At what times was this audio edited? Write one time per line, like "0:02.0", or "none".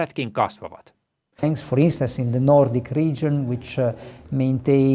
0:01.4